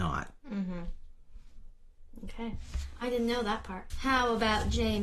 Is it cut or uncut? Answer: cut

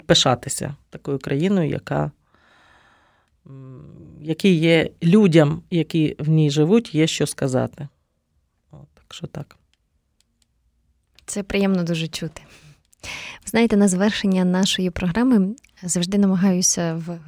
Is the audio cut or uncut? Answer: uncut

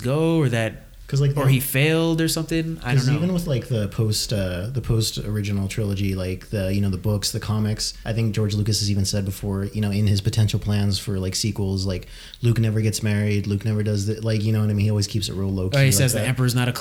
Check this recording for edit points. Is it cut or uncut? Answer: uncut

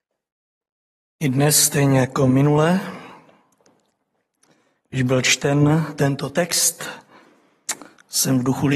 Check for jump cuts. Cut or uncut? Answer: uncut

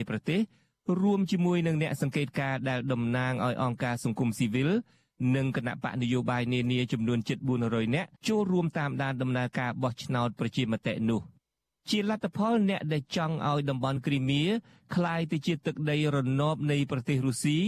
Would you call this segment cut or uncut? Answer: cut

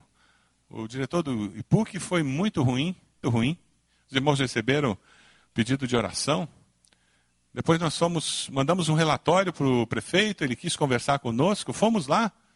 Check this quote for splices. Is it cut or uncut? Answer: cut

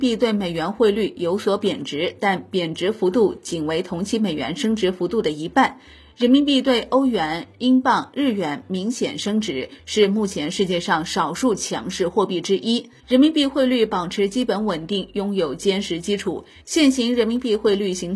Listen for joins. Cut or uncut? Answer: cut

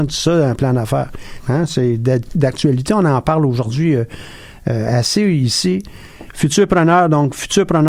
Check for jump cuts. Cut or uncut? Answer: cut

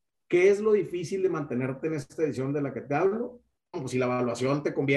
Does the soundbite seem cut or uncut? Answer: cut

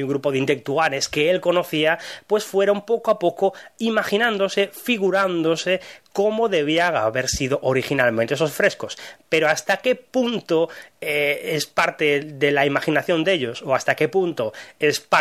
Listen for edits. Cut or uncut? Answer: uncut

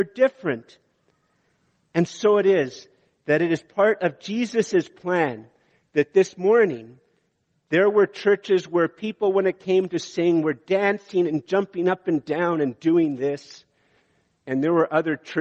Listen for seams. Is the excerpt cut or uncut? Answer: uncut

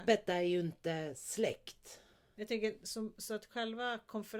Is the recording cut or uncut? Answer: cut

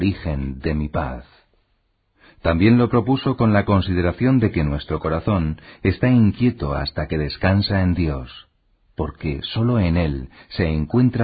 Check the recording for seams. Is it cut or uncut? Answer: uncut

